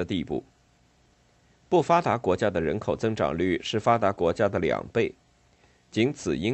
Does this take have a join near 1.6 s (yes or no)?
no